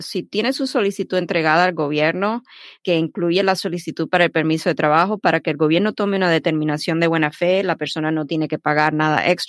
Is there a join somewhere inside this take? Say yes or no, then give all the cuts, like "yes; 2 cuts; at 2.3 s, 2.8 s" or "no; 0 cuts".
no; 0 cuts